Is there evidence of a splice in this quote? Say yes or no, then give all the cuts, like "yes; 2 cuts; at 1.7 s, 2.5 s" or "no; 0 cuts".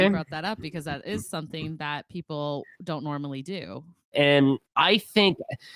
yes; 1 cut; at 4.1 s